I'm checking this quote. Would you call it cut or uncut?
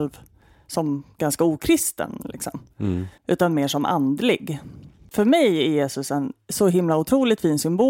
cut